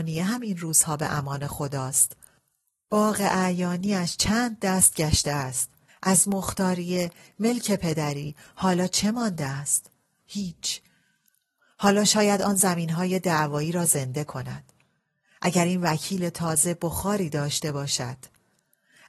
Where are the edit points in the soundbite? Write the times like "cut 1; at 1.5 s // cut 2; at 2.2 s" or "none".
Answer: cut 1; at 5.9 s // cut 2; at 10.2 s

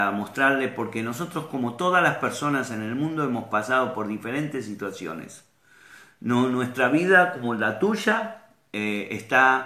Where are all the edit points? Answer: none

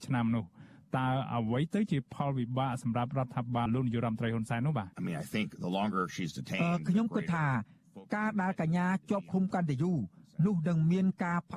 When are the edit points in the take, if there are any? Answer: cut 1; at 3.7 s // cut 2; at 4.9 s

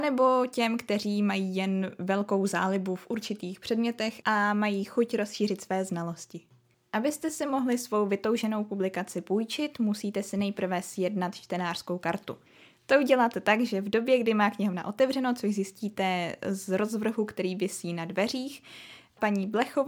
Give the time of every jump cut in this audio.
none

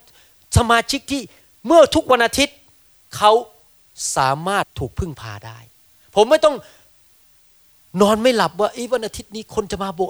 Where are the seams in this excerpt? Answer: cut 1; at 4.6 s

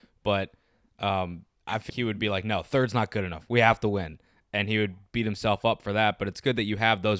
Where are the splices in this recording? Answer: cut 1; at 1.9 s

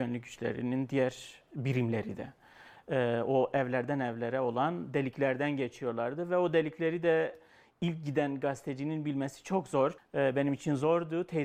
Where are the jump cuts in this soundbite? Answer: cut 1; at 10.0 s

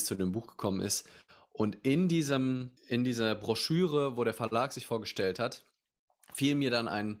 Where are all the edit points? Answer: cut 1; at 2.8 s

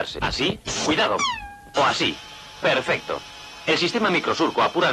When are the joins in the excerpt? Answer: cut 1; at 1.8 s

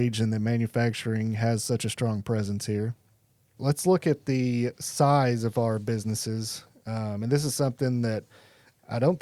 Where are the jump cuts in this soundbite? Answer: cut 1; at 3.6 s

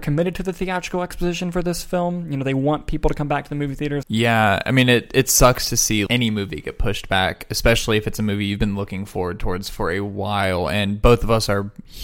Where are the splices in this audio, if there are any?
cut 1; at 4.0 s // cut 2; at 6.1 s

